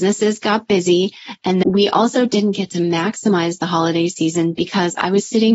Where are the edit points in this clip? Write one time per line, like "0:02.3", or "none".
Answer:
0:01.6